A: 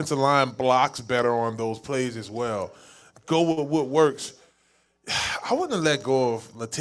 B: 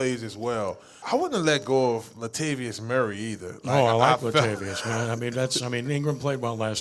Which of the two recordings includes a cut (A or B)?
B